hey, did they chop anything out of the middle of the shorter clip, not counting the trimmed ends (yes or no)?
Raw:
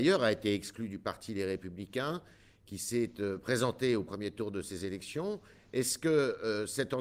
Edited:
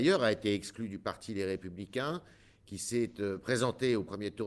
no